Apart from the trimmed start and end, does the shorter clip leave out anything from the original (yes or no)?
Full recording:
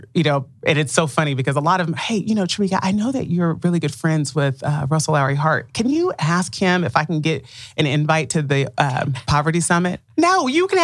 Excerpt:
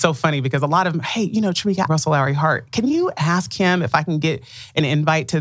yes